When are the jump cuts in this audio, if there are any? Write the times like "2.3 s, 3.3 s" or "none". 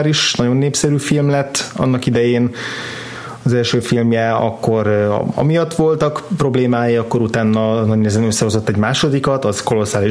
none